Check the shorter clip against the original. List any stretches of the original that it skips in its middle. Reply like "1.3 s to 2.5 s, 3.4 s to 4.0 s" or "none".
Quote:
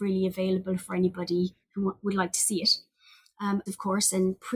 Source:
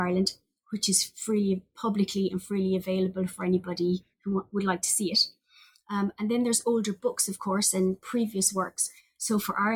6.2 s to 7.3 s